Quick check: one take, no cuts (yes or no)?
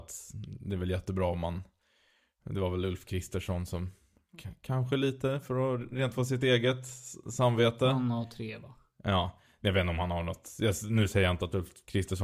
yes